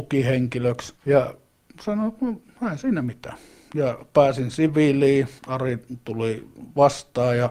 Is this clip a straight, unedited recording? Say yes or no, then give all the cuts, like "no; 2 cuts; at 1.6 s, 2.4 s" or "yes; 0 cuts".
no; 2 cuts; at 1.0 s, 5.4 s